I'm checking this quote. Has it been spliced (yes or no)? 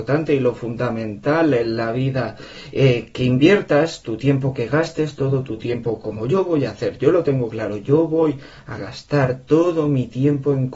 no